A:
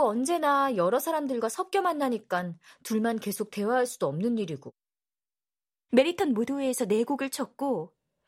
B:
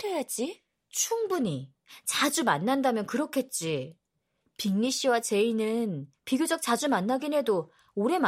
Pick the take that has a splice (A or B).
A